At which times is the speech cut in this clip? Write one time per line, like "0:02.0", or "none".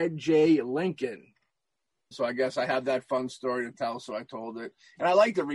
0:02.1